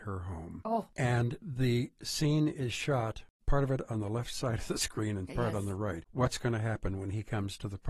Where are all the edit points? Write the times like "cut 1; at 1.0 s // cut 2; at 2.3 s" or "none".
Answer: cut 1; at 6.1 s